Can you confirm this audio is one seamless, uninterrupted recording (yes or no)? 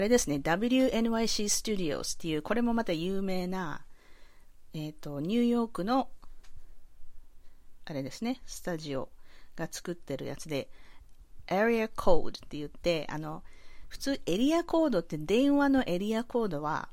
yes